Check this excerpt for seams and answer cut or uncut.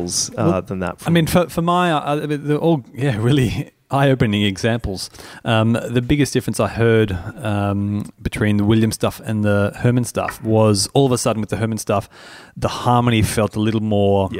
uncut